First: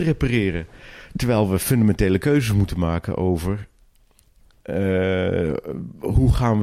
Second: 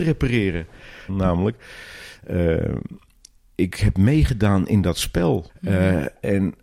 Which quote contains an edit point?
second; 2 cuts; at 1.1 s, 5.5 s

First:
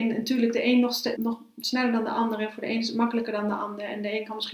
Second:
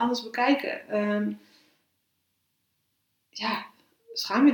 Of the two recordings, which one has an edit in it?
first; 1 cut; at 1.2 s

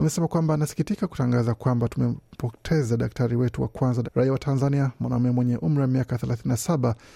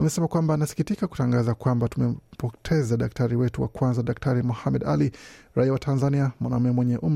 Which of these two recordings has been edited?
first; 1 cut; at 4.0 s

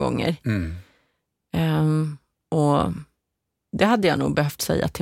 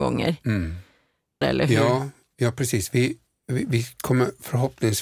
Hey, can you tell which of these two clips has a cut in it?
second; 1 cut; at 1.4 s

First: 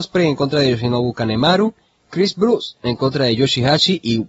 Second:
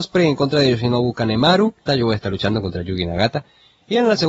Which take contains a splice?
second; 1 cut; at 1.9 s

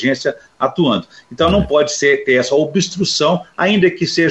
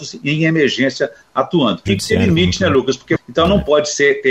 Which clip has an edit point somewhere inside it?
second; 2 cuts; at 1.9 s, 3.2 s

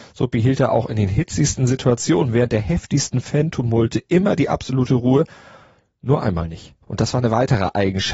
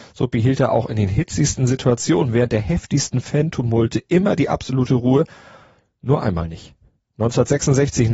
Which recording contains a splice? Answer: first; 1 cut; at 6.8 s

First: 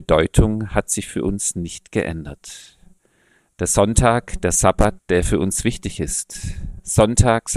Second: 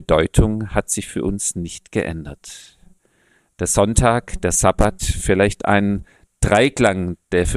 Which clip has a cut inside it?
first; 1 cut; at 5.0 s

